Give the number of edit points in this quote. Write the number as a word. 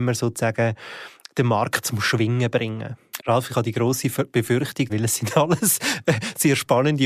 two